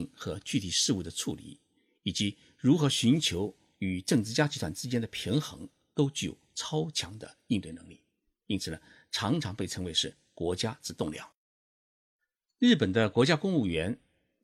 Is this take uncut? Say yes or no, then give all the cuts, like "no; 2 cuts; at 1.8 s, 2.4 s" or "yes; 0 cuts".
yes; 0 cuts